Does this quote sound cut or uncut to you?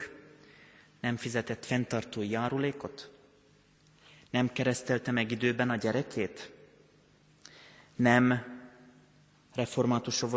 uncut